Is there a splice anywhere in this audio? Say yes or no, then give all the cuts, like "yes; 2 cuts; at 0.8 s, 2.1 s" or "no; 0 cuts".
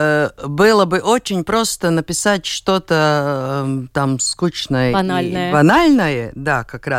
no; 0 cuts